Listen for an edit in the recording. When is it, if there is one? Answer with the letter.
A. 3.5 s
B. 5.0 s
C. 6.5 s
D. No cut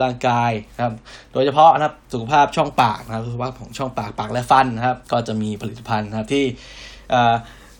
B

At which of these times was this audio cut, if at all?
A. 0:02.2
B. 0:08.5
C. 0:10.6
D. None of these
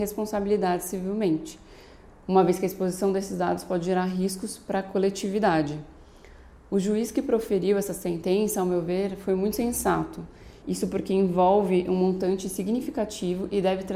C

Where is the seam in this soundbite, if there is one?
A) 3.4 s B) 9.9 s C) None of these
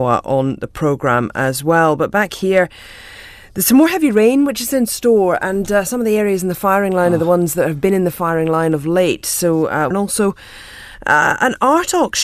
B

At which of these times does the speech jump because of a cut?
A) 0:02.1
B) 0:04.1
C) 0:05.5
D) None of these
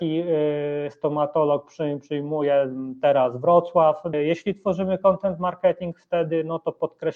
B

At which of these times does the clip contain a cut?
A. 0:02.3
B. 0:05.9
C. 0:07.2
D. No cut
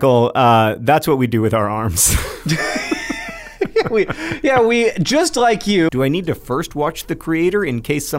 B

